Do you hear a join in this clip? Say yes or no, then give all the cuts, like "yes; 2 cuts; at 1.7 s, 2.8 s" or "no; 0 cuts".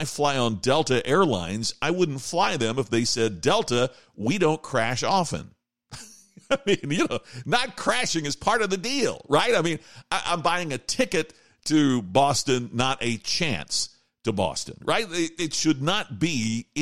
no; 0 cuts